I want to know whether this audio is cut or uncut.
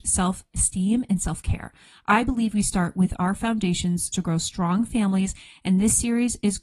cut